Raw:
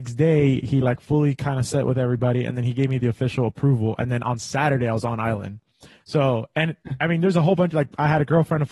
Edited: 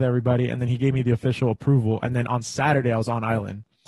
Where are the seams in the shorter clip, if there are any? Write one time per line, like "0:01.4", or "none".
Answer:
none